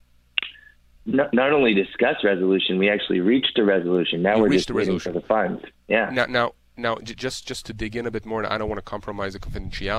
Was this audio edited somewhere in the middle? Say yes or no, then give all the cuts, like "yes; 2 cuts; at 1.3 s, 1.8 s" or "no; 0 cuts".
no; 0 cuts